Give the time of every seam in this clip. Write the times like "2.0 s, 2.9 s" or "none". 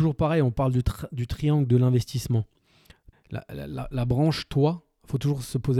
3.1 s